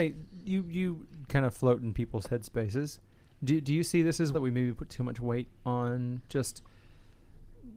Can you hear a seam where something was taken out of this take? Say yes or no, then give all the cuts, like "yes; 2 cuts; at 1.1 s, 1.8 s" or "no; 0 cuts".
yes; 2 cuts; at 4.3 s, 5.6 s